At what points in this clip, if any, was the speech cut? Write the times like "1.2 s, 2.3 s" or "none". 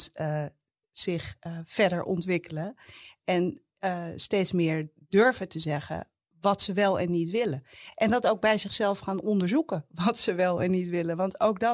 none